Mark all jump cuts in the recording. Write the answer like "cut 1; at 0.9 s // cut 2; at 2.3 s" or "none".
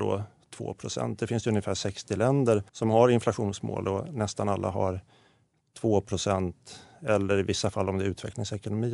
cut 1; at 2.7 s